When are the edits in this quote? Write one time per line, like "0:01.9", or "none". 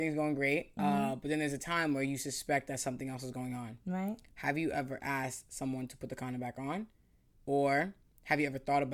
none

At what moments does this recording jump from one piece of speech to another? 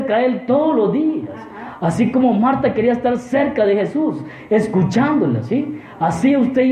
none

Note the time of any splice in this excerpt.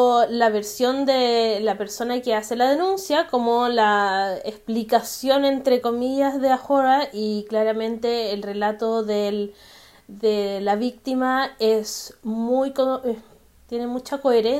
none

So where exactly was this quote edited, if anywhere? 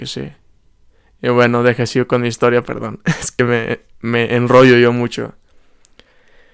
none

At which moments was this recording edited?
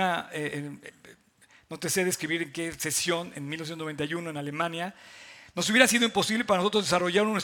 none

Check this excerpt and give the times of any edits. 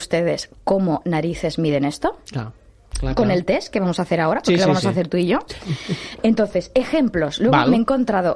0:06.2

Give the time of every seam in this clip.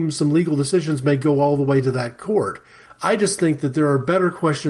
0:02.9

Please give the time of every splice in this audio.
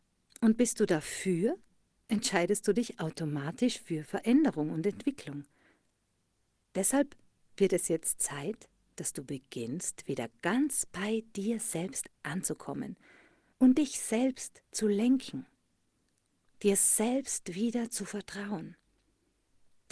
0:06.6
0:14.7

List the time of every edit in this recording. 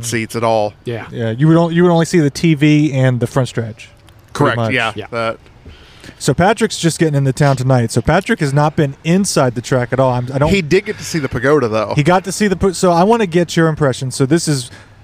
none

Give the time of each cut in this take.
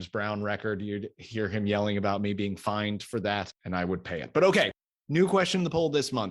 none

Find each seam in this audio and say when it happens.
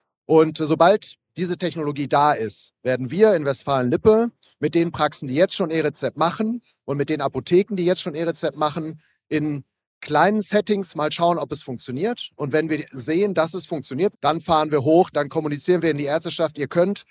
0:14.1
0:15.1

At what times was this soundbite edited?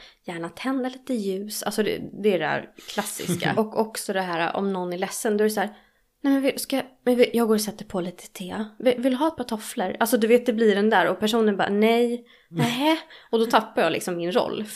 0:03.5

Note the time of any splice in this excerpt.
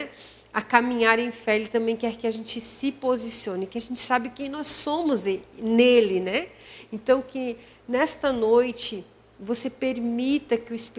none

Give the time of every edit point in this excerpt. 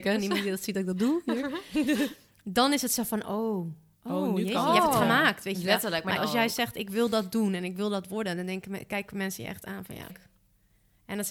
0:06.2
0:10.1

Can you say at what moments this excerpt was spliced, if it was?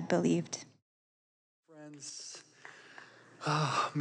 none

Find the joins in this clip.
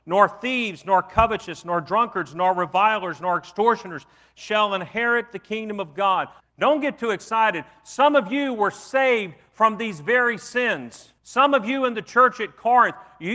0:06.4
0:11.2

